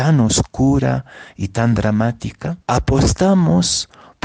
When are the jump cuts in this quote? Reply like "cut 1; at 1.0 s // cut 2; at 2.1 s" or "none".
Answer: cut 1; at 2.6 s